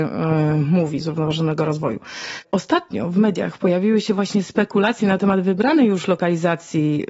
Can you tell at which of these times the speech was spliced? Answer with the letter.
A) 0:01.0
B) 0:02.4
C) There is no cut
A